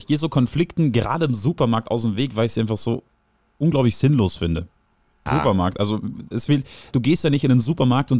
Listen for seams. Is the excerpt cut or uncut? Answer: cut